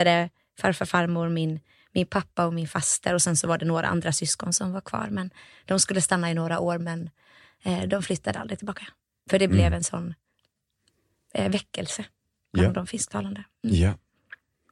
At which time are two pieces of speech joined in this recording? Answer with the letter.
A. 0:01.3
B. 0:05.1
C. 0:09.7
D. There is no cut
D